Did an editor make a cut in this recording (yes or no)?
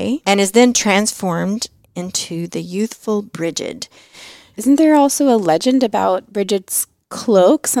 yes